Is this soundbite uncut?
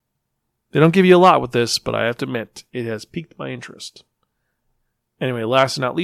yes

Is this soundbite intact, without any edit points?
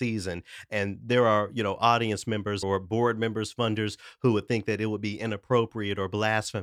no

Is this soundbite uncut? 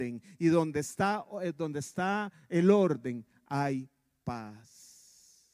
yes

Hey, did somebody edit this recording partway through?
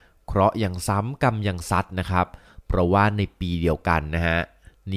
no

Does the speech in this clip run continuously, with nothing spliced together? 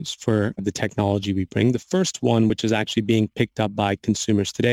yes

